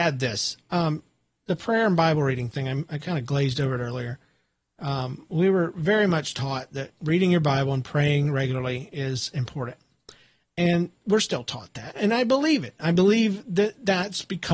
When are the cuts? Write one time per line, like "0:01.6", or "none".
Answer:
none